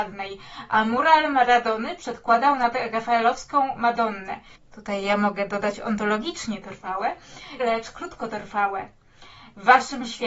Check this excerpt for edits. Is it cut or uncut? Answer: cut